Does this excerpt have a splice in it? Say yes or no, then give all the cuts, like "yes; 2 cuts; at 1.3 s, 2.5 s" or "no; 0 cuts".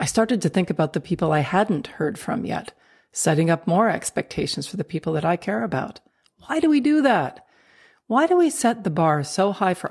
no; 0 cuts